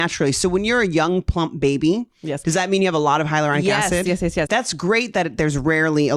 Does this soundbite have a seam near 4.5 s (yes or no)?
yes